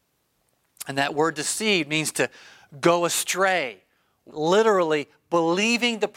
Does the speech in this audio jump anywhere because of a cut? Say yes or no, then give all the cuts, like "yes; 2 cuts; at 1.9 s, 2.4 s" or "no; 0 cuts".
yes; 1 cut; at 4.3 s